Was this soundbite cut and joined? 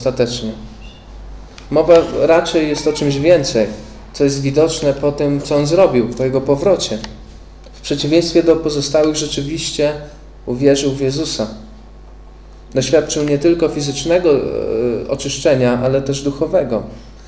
no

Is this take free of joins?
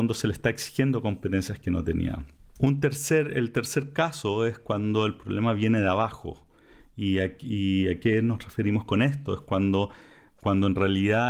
yes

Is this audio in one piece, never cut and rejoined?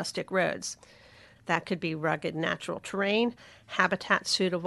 no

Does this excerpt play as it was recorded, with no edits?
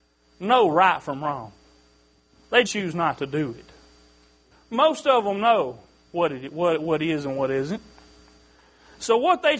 no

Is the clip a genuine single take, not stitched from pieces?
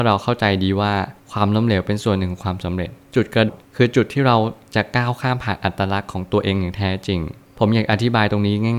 no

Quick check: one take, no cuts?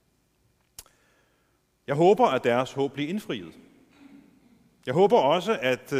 yes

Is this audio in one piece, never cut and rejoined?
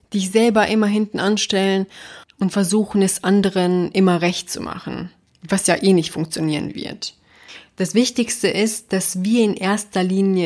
yes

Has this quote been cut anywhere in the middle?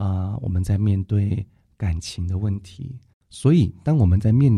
yes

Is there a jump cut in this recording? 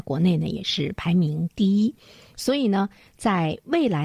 no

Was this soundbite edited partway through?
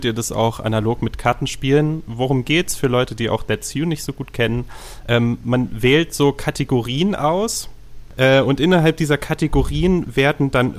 no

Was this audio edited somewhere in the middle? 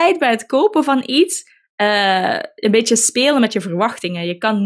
no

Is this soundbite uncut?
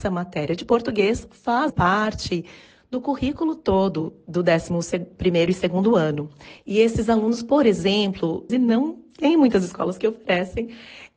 no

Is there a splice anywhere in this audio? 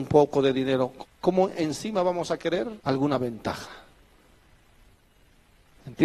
yes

